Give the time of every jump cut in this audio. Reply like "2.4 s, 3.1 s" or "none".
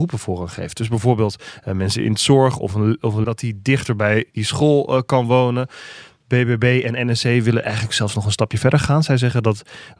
3.2 s